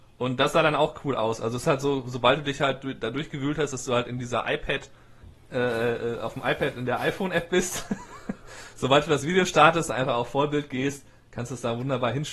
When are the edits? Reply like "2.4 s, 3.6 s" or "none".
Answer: none